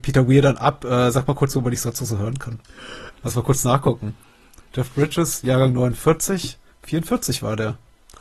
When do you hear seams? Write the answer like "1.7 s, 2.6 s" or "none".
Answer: 3.1 s, 6.7 s